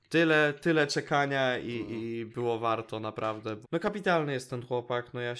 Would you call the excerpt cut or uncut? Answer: cut